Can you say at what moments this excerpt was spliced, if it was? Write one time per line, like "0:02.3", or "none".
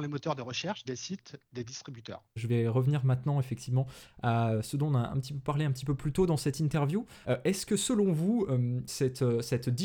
0:02.4
0:07.2